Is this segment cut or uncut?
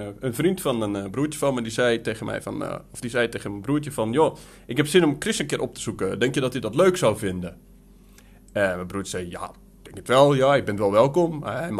uncut